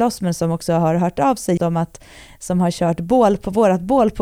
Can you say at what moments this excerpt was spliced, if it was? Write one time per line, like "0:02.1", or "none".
0:01.6